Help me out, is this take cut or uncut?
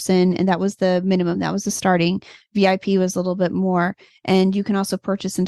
uncut